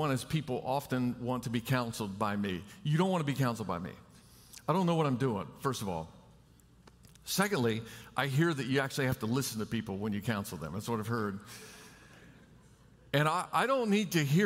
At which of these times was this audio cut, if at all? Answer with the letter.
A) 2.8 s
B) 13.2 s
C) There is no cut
C